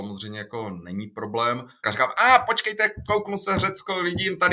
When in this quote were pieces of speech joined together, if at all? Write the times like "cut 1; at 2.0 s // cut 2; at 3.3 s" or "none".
cut 1; at 1.8 s